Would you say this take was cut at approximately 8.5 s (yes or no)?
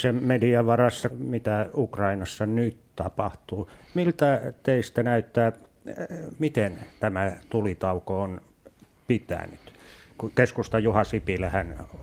no